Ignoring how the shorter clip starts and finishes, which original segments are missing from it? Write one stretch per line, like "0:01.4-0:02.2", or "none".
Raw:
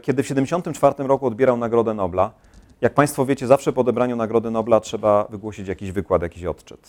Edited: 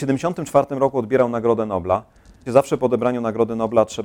0:02.7-0:03.4